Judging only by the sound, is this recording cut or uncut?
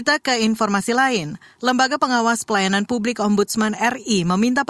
uncut